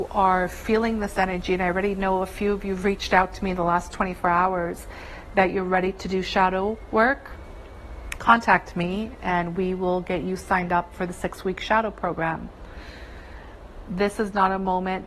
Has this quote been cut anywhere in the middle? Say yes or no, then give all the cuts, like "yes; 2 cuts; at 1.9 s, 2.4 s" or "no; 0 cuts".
yes; 1 cut; at 8.2 s